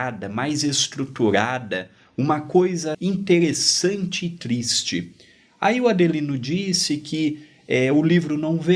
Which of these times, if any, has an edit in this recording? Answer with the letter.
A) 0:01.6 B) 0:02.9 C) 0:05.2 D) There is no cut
B